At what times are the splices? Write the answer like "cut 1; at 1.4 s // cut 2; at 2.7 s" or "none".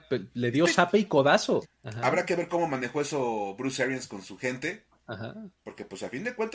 cut 1; at 1.6 s